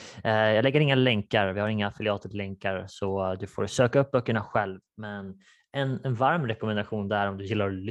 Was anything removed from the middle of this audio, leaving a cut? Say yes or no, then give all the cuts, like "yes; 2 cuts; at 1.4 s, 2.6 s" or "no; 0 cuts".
no; 0 cuts